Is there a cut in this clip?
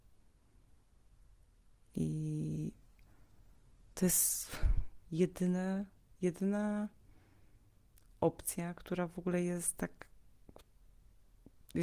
no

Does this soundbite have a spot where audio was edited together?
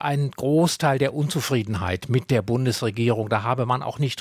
no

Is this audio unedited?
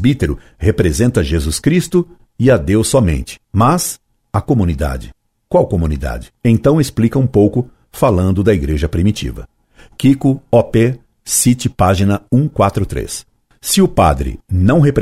yes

